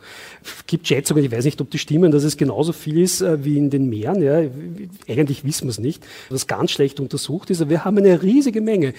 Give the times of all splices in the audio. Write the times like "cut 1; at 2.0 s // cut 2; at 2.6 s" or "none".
cut 1; at 6.3 s